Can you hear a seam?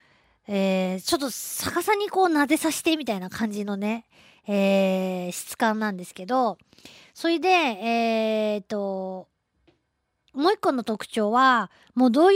no; 0 cuts

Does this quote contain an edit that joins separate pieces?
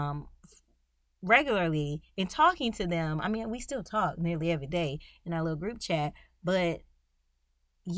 no; 0 cuts

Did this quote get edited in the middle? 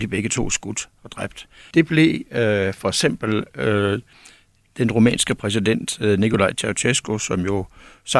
yes; 1 cut; at 1.7 s

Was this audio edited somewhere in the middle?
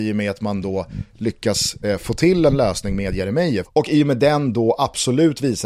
no; 0 cuts

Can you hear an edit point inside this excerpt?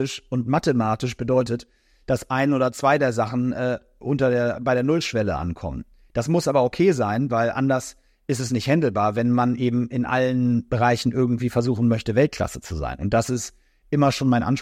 no; 0 cuts

